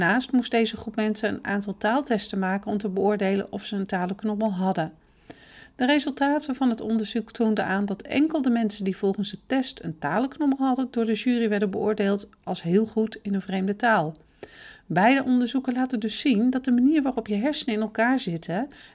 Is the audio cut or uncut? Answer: uncut